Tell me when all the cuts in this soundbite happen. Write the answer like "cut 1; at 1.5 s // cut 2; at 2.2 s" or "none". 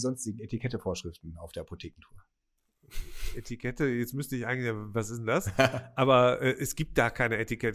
none